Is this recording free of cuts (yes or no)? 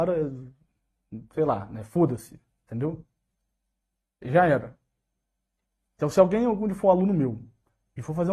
yes